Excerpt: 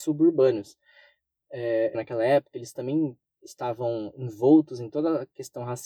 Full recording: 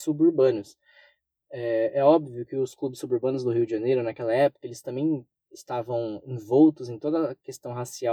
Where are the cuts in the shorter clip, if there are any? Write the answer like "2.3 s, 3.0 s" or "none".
1.9 s